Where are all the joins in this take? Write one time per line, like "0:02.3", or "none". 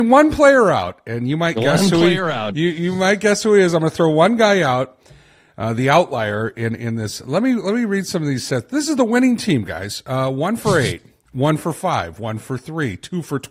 none